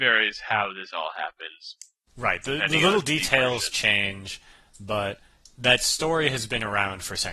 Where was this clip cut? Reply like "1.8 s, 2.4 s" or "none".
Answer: none

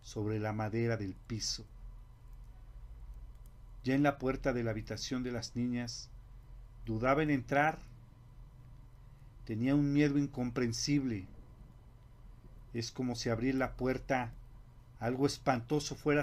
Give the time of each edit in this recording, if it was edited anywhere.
none

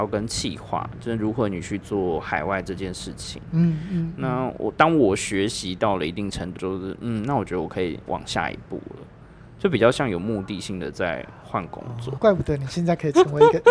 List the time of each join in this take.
6.6 s, 12.2 s

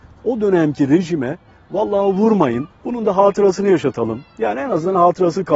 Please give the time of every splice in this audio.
2.7 s

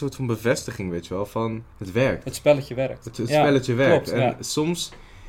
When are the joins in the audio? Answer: 1.7 s

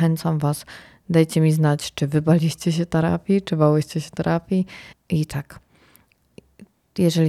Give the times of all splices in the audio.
4.9 s

